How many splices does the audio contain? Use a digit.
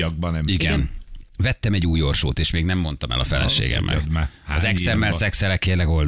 1